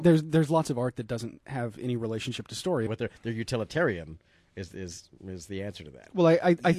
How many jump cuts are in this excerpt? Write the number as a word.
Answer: one